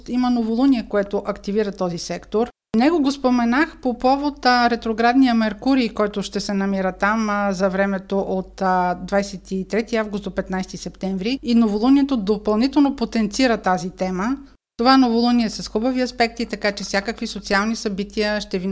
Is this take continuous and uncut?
yes; 0 cuts

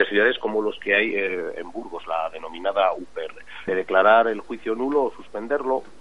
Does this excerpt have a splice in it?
yes; 1 cut; at 3.7 s

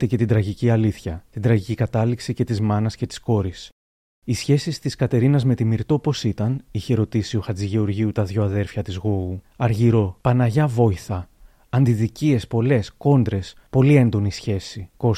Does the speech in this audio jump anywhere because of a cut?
no; 0 cuts

